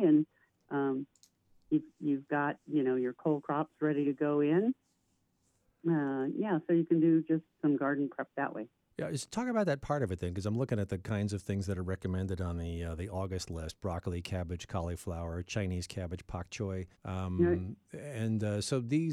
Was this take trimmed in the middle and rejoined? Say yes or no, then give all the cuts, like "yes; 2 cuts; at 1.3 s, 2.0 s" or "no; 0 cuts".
yes; 1 cut; at 16.9 s